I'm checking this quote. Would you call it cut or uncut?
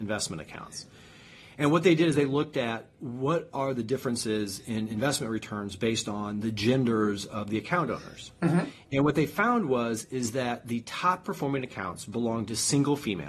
uncut